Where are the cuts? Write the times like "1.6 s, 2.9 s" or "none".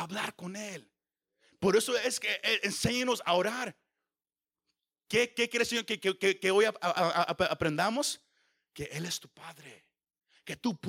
none